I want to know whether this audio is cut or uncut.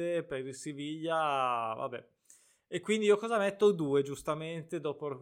uncut